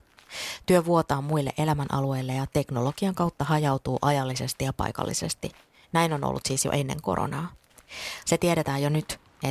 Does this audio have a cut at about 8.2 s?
yes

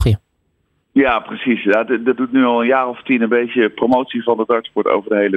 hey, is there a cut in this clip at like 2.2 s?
yes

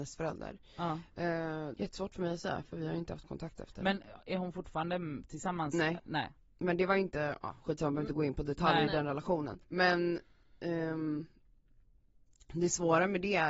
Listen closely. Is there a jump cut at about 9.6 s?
yes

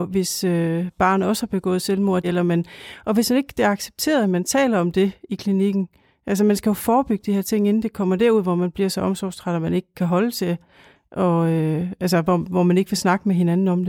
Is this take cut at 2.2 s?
yes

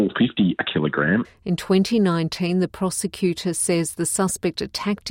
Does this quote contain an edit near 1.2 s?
yes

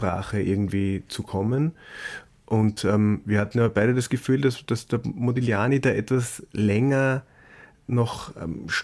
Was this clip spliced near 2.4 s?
no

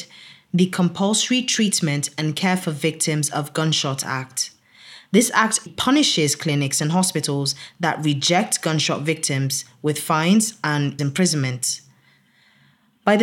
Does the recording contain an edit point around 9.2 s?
no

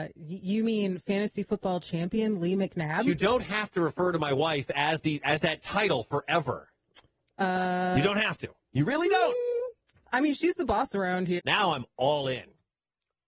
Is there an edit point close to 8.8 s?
no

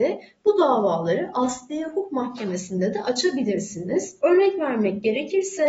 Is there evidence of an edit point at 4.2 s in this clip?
yes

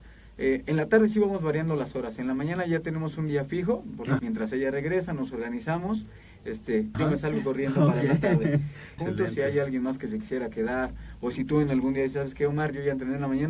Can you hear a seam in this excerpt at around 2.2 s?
no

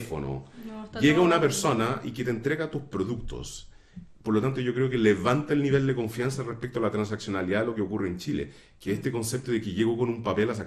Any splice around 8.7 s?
no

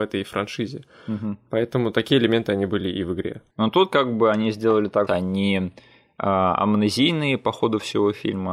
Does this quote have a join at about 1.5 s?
no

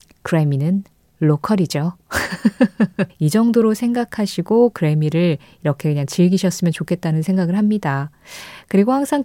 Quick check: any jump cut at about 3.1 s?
yes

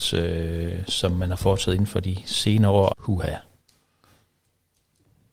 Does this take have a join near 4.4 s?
no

